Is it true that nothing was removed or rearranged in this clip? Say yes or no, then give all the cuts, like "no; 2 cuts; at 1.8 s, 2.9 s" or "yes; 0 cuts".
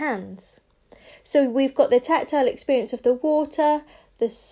yes; 0 cuts